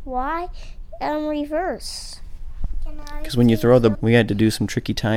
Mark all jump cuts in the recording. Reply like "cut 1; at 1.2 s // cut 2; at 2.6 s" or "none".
cut 1; at 3.9 s